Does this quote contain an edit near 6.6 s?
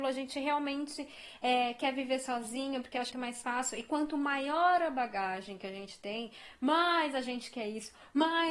no; 1 cut; at 3.1 s

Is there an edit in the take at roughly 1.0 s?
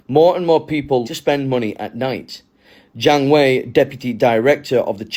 yes; 1 cut; at 1.0 s

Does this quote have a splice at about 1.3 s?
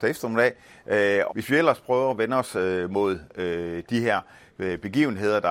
yes; 1 cut; at 1.3 s

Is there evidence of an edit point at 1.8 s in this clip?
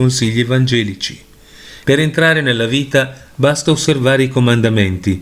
yes; 1 cut; at 1.8 s

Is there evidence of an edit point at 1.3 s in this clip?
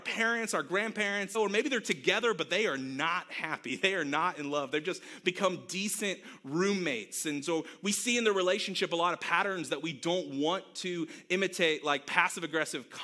yes; 1 cut; at 1.3 s

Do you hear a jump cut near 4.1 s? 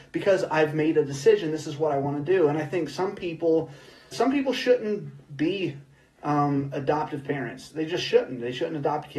yes; 1 cut; at 4.1 s

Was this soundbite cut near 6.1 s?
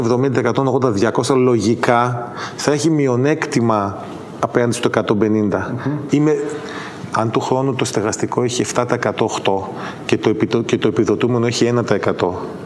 yes; 1 cut; at 6.1 s

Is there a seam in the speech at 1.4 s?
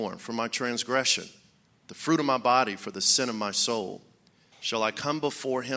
no; 1 cut; at 4.5 s

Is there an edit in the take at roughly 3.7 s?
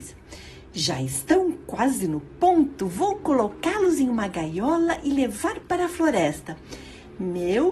no; 0 cuts

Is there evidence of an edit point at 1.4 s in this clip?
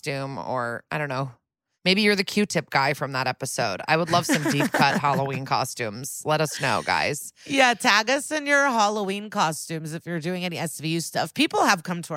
no; 0 cuts

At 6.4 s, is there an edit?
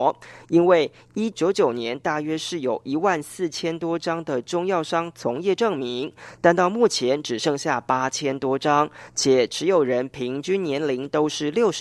no; 1 cut; at 1.3 s

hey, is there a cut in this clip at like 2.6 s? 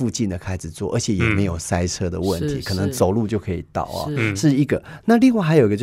no; 0 cuts

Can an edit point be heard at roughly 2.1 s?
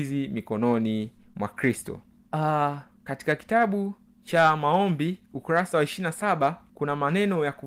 no; 0 cuts

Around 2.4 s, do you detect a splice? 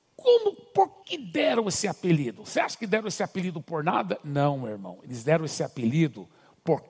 no; 1 cut; at 1.0 s

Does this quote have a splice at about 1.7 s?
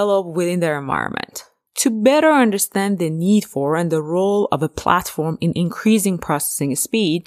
yes; 1 cut; at 1.7 s

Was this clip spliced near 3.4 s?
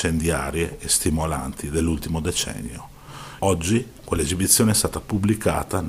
yes; 1 cut; at 3.4 s

